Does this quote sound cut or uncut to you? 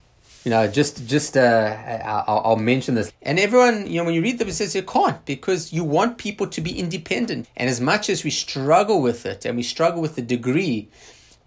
cut